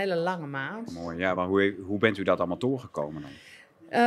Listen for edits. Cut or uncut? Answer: uncut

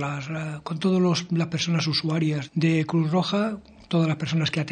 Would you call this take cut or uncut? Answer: cut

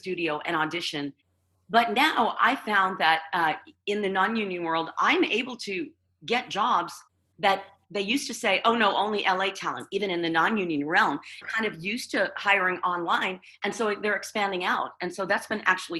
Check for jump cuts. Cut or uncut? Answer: cut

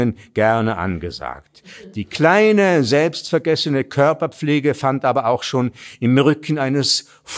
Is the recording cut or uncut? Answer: uncut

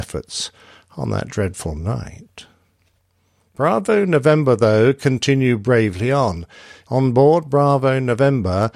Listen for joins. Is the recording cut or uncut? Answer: cut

